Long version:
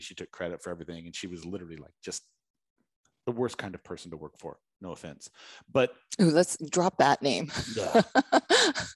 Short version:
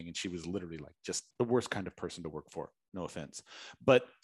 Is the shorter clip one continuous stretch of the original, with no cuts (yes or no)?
no